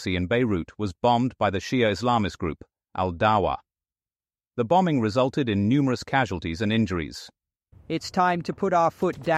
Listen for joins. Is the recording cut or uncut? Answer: cut